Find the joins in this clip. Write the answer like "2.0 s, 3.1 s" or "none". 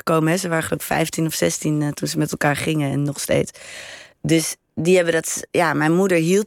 none